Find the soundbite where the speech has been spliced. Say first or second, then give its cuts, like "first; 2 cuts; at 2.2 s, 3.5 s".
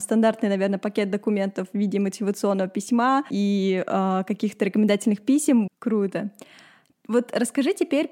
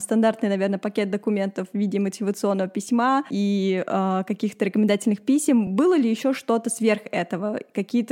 first; 1 cut; at 5.7 s